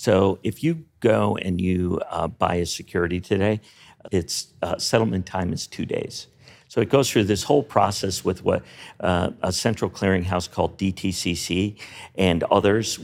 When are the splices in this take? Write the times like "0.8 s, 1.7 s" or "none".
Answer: 4.0 s